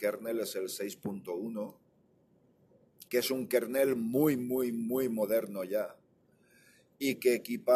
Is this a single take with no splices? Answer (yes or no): no